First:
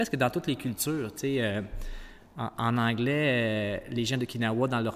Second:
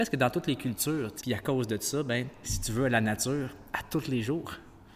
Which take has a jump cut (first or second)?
second